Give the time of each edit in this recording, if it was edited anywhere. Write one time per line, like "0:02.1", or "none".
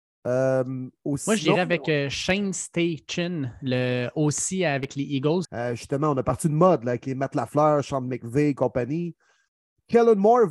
0:05.4